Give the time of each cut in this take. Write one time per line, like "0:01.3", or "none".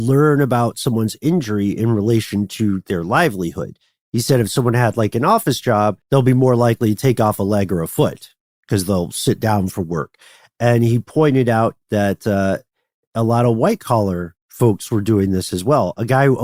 0:06.0